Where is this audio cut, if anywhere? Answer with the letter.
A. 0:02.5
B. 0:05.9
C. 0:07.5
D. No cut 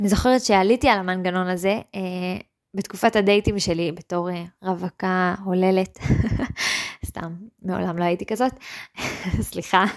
D